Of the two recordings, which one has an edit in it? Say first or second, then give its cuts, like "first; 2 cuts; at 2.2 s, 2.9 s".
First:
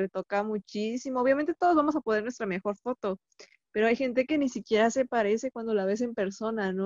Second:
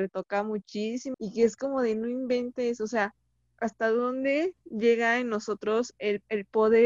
second; 1 cut; at 1.1 s